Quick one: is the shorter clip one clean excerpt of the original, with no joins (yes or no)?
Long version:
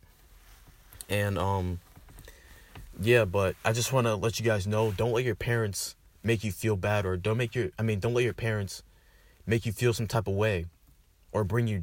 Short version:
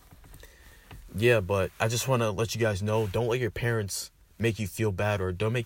yes